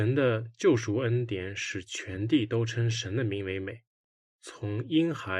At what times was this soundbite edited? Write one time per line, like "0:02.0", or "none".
0:04.4